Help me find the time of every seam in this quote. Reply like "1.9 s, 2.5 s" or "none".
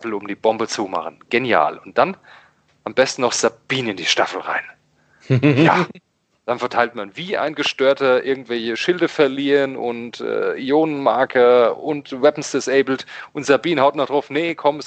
none